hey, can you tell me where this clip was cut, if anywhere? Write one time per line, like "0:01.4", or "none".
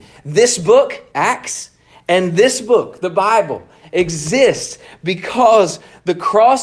none